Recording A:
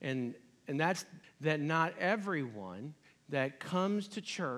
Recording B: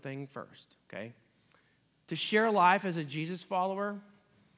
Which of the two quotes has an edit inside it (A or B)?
A